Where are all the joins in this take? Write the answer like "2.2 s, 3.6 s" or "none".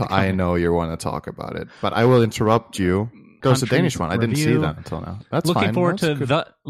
3.4 s